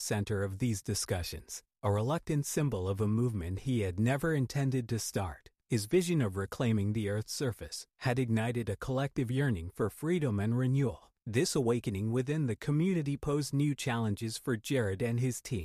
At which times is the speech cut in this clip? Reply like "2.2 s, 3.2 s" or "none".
7.9 s